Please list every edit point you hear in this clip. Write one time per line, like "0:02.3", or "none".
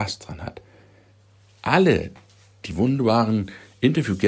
none